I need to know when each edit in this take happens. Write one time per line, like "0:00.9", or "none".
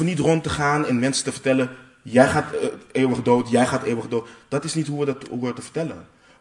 none